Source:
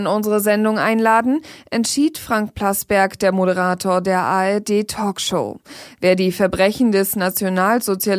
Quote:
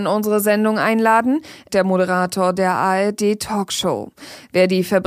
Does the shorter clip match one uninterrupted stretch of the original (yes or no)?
no